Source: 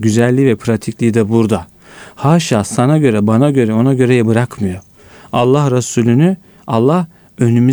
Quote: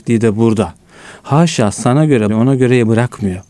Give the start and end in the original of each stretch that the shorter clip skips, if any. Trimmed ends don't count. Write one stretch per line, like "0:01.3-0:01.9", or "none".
0:03.2-0:03.7